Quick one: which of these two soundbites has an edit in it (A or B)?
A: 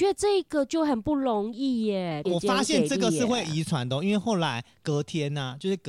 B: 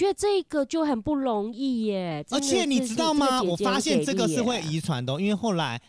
A